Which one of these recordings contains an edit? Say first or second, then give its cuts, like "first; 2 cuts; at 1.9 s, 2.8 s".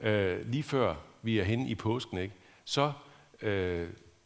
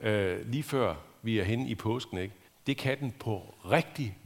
second; 1 cut; at 2.5 s